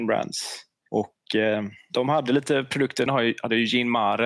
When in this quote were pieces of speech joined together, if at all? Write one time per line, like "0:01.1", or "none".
0:03.1